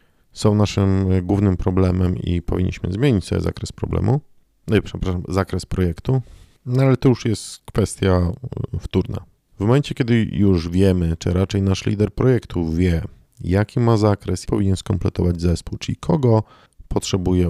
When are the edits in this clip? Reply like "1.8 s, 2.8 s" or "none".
9.5 s, 14.5 s